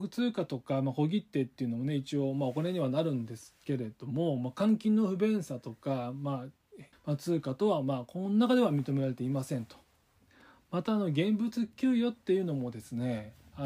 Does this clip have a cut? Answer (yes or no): yes